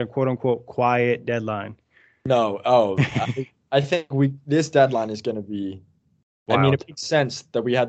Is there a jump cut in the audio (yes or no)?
no